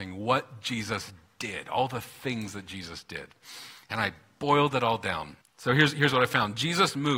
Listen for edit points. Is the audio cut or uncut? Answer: cut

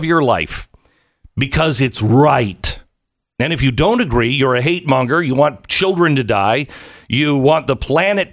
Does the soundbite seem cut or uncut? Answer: uncut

